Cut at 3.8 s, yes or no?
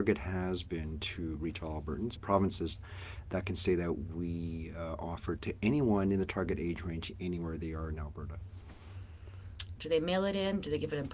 no